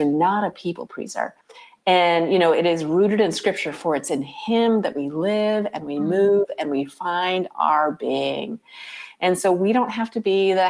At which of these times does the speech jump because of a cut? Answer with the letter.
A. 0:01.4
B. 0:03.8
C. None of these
A